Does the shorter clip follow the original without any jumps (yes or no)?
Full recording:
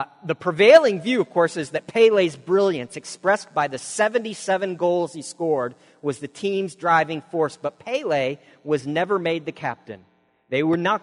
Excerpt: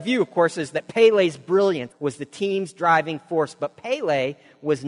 no